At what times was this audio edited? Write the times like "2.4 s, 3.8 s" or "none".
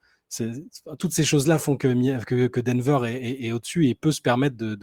none